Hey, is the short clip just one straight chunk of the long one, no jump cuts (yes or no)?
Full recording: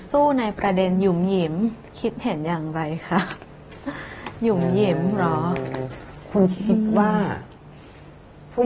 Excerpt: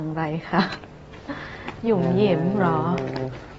yes